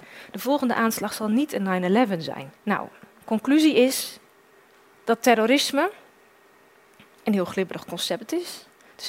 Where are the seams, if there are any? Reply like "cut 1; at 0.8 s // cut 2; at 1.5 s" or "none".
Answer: cut 1; at 2.6 s